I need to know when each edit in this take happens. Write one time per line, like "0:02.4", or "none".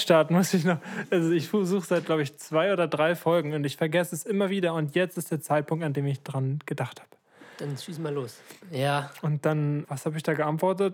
0:08.6
0:09.8